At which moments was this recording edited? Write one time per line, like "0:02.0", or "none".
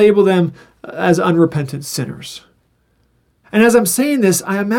0:03.4